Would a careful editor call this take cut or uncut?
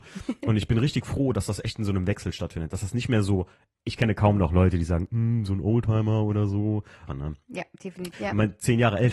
cut